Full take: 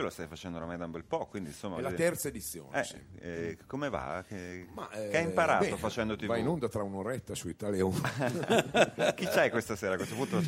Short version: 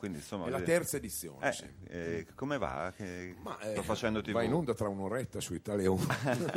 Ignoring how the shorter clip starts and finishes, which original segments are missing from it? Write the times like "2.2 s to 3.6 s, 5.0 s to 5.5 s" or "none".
5.1 s to 5.7 s